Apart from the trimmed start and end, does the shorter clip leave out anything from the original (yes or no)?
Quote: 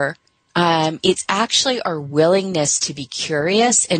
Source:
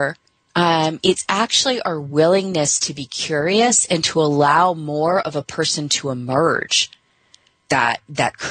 no